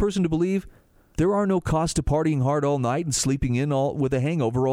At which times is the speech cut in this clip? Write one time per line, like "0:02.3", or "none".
0:01.2